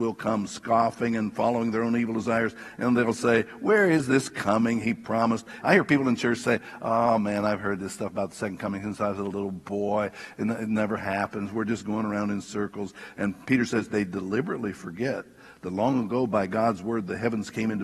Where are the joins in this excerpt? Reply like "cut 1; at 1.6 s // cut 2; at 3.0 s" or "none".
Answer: cut 1; at 5.6 s